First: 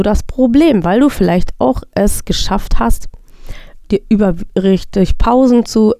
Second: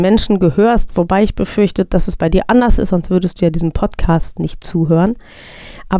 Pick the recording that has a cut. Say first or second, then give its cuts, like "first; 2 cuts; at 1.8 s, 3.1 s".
first; 1 cut; at 3.8 s